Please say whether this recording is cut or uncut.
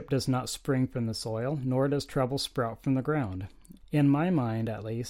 cut